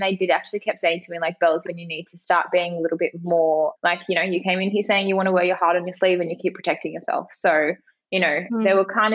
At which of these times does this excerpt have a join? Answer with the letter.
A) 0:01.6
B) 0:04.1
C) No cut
A